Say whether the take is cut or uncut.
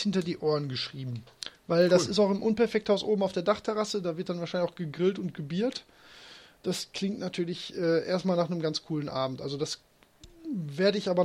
uncut